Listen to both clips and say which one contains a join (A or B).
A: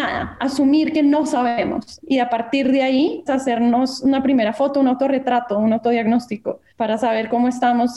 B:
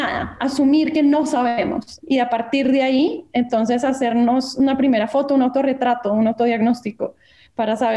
A